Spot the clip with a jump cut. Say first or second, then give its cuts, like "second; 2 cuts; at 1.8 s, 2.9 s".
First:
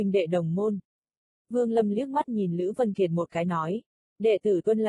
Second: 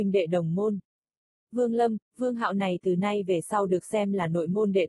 second; 1 cut; at 1.3 s